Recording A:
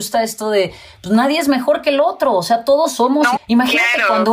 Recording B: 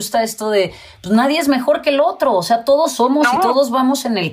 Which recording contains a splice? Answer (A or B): A